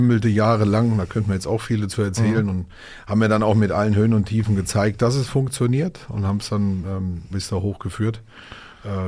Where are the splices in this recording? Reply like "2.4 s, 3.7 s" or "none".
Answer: 7.3 s